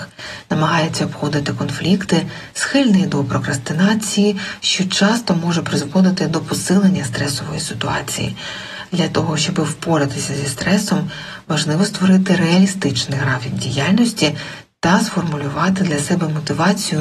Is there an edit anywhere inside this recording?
no; 0 cuts

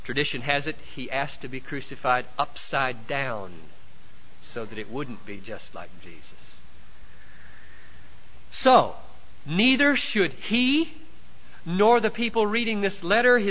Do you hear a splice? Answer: no; 0 cuts

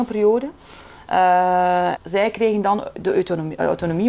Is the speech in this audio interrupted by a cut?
yes; 1 cut; at 2.0 s

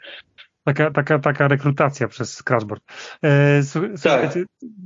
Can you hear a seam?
no; 0 cuts

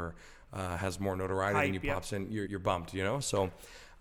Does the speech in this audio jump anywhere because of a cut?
yes; 1 cut; at 2.5 s

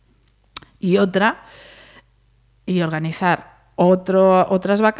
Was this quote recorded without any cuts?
yes; 0 cuts

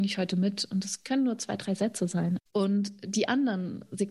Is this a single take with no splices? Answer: no; 1 cut; at 2.4 s

